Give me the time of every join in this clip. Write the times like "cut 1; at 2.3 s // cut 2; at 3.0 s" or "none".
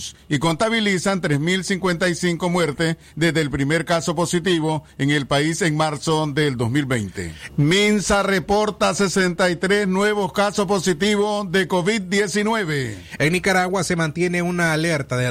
cut 1; at 7.5 s // cut 2; at 13.2 s

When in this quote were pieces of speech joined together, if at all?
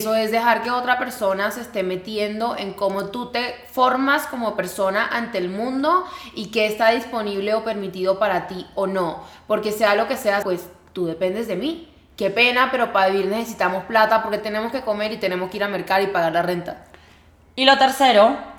cut 1; at 10.4 s

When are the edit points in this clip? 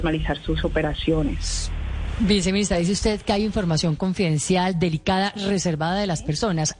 none

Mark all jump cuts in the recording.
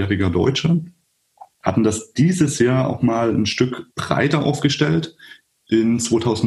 cut 1; at 1.6 s // cut 2; at 3.9 s

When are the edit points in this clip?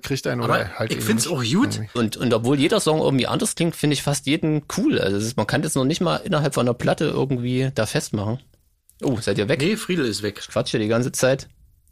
cut 1; at 2.0 s

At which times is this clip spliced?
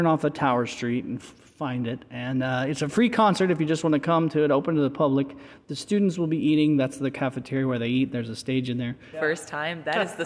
cut 1; at 9.1 s

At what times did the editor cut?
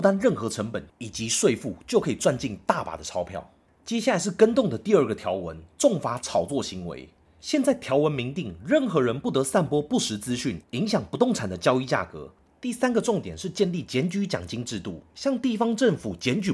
cut 1; at 12.5 s // cut 2; at 15.1 s

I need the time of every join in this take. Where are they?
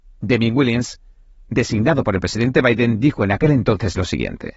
none

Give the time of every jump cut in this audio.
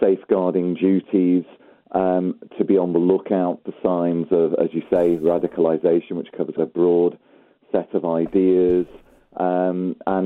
cut 1; at 6.6 s

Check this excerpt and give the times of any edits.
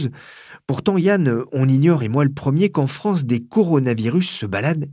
none

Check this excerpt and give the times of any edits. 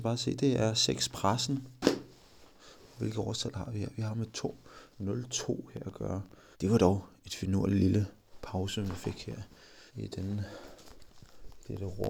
cut 1; at 6.5 s // cut 2; at 9.9 s

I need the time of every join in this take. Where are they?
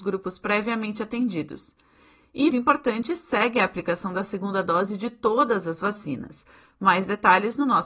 cut 1; at 2.5 s

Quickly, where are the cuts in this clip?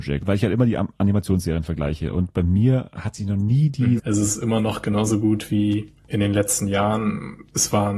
cut 1; at 4.0 s

